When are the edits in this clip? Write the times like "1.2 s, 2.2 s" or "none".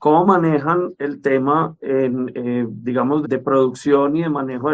3.2 s